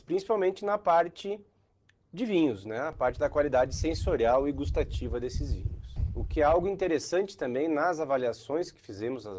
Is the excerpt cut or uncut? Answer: uncut